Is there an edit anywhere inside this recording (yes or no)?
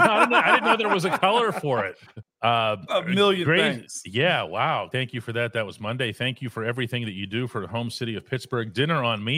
yes